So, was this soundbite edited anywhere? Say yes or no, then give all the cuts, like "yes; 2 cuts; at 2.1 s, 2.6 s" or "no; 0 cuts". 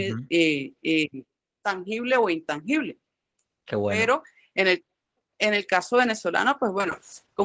no; 0 cuts